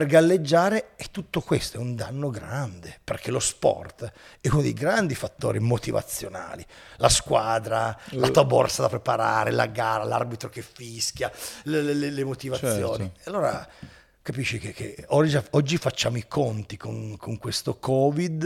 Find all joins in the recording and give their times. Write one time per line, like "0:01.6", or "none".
none